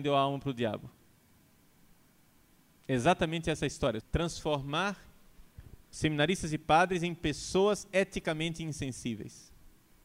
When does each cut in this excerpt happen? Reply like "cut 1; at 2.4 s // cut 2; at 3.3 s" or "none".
cut 1; at 4.0 s